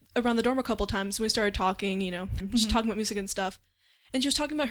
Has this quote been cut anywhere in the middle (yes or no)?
yes